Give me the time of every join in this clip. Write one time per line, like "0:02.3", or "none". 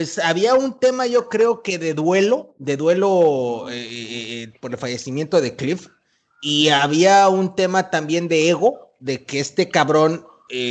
none